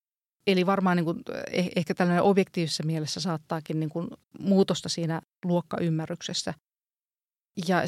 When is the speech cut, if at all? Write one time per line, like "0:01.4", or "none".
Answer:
0:04.2